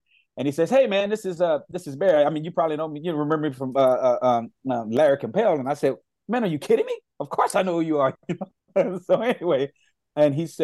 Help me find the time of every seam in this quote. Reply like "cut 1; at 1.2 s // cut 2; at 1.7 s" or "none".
none